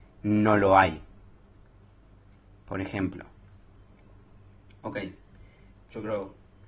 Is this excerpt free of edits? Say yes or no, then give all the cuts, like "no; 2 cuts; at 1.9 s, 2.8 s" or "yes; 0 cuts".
no; 1 cut; at 5.7 s